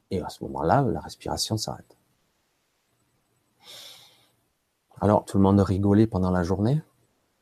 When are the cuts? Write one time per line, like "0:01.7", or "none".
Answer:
0:05.2